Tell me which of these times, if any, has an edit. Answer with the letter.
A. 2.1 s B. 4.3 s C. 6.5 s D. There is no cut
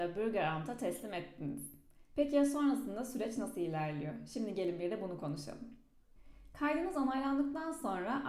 D